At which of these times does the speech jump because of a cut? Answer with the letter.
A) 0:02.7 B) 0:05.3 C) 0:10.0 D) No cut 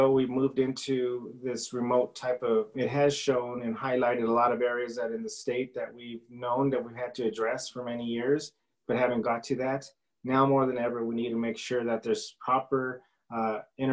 A